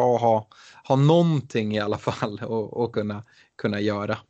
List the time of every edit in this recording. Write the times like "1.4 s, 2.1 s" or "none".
none